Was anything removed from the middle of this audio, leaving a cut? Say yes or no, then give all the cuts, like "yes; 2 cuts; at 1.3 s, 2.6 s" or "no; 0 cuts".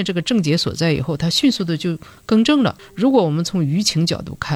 no; 0 cuts